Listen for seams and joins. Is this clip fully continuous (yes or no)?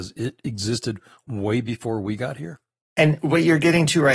yes